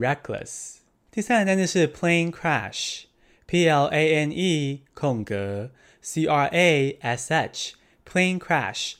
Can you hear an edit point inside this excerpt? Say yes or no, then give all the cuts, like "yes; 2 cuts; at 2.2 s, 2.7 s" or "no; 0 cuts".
no; 0 cuts